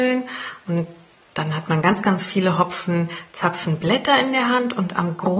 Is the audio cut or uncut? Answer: uncut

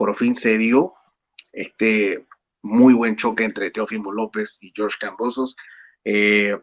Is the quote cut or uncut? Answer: uncut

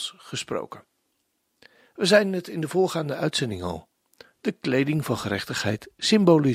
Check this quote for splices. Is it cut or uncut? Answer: uncut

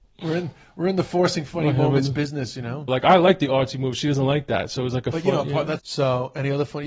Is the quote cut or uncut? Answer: cut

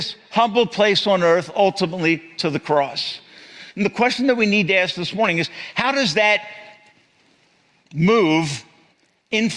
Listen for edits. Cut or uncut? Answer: uncut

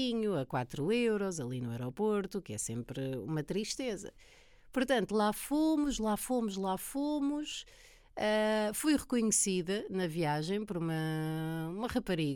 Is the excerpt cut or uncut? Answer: uncut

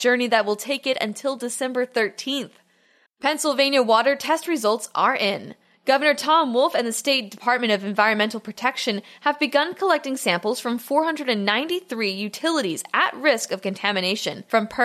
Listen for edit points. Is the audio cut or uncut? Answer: cut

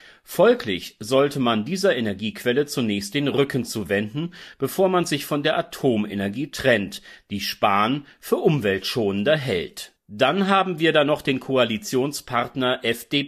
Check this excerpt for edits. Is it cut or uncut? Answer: uncut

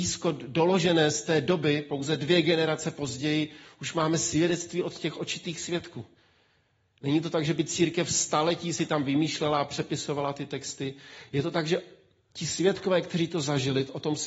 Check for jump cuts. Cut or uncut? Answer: uncut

